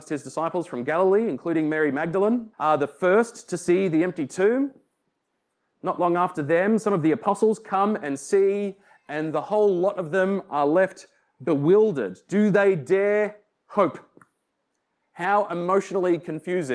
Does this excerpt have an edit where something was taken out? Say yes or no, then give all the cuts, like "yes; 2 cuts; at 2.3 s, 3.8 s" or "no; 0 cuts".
yes; 1 cut; at 2.5 s